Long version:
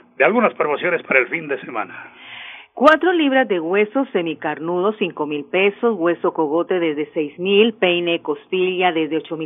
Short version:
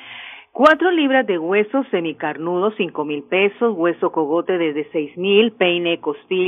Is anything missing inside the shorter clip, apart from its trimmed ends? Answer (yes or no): no